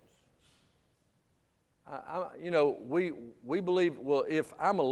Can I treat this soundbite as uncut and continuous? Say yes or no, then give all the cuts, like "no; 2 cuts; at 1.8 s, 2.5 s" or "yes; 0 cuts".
yes; 0 cuts